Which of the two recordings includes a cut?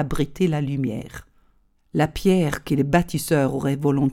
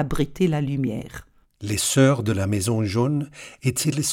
second; 1 cut; at 1.4 s

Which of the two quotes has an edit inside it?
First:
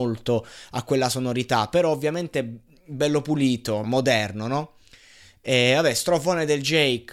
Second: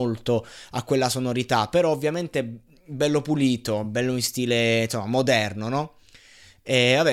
first; 1 cut; at 3.8 s

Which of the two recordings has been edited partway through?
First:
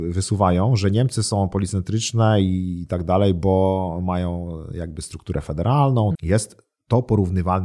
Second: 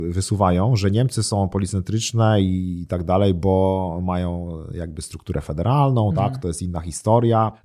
first; 1 cut; at 6.1 s

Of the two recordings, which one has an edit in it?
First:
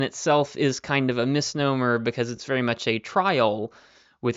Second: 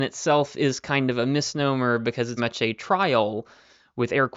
second; 1 cut; at 2.4 s

